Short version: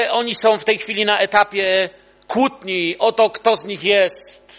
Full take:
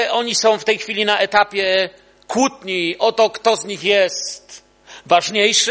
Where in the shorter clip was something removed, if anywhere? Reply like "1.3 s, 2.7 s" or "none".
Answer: none